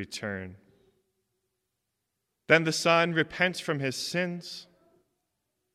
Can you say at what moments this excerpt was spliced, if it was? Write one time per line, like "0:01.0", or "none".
none